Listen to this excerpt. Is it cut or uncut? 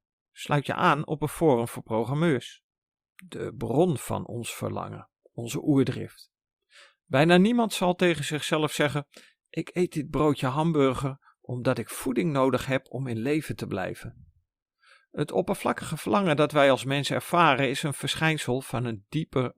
uncut